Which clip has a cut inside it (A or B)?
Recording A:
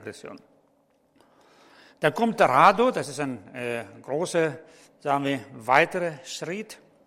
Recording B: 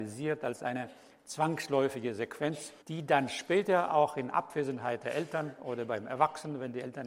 B